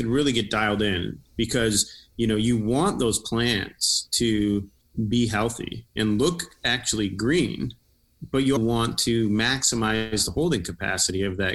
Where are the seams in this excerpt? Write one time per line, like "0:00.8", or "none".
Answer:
0:08.6